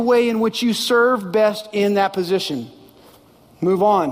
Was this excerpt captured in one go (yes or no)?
yes